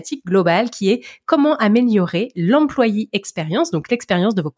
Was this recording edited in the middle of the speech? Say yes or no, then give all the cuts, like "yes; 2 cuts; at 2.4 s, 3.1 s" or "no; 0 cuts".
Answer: no; 0 cuts